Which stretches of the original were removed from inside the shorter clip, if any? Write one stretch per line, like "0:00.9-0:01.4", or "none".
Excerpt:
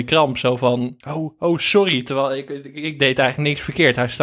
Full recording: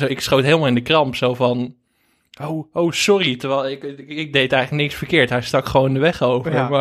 0:01.8-0:02.3